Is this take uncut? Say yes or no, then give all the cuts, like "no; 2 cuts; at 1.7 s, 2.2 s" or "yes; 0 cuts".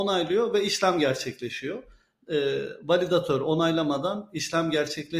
yes; 0 cuts